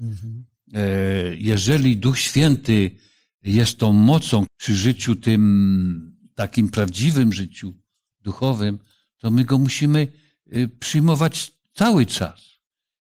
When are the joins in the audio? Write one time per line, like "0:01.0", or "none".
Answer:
0:04.5